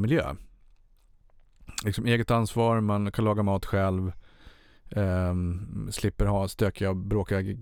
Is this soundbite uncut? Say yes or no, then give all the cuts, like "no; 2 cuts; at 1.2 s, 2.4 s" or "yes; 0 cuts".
yes; 0 cuts